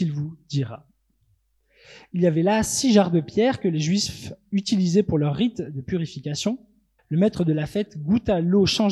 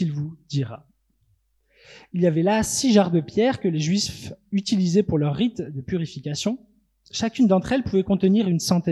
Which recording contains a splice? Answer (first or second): first